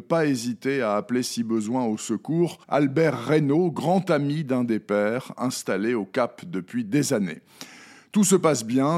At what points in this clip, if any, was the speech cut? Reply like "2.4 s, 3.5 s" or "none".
2.6 s

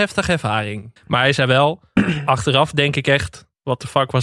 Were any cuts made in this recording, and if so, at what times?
1.0 s

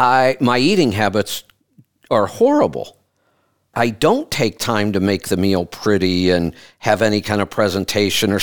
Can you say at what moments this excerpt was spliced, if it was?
3.7 s

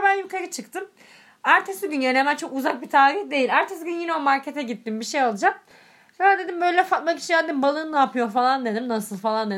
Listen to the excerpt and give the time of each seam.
none

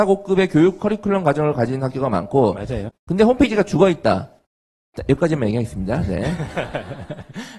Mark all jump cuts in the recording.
2.9 s

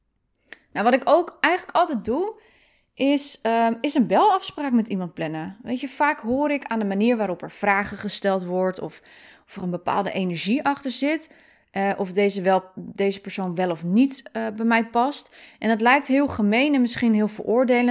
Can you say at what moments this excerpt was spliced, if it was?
none

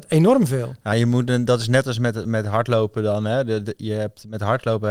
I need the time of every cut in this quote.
none

